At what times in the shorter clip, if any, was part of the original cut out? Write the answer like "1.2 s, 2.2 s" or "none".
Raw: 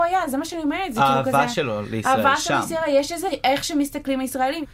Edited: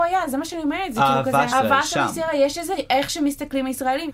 1.5 s